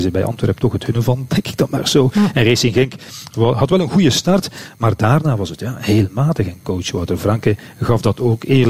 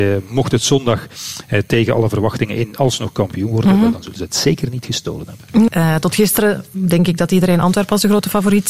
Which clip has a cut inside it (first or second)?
second